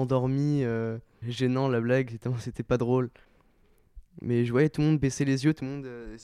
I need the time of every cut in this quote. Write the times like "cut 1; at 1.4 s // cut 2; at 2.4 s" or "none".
cut 1; at 1.2 s